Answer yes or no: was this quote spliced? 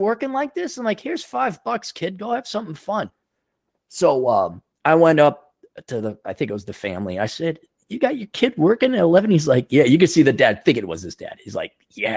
no